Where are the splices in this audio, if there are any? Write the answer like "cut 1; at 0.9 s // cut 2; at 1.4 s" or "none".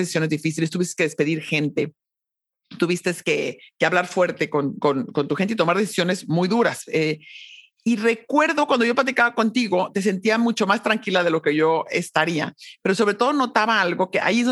none